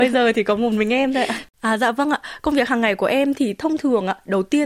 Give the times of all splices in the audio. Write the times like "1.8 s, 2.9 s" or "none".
1.6 s